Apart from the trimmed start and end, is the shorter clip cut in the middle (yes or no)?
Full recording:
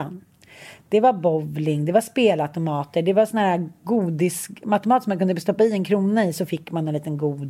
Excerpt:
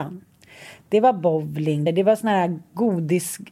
yes